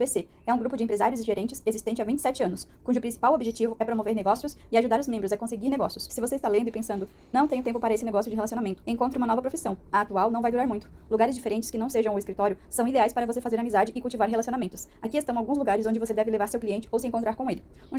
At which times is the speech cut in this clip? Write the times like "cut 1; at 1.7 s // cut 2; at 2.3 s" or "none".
cut 1; at 6.1 s // cut 2; at 8.8 s